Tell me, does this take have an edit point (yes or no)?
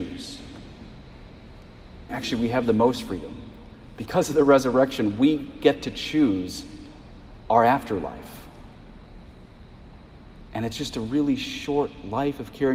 yes